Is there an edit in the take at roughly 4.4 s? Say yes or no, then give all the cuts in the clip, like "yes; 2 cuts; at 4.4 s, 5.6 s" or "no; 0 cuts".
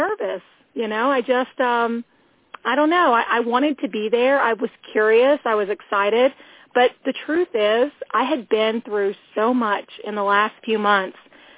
no; 0 cuts